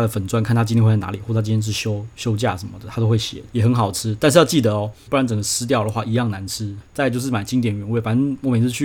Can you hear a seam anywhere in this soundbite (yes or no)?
yes